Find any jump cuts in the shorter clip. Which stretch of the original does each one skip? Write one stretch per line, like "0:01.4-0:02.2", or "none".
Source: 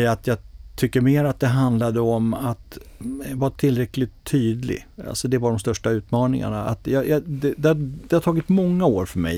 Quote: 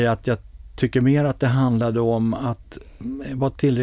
none